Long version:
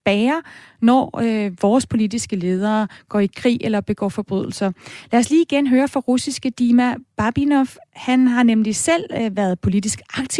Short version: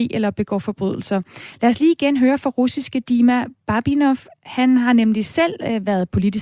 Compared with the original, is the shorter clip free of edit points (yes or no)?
yes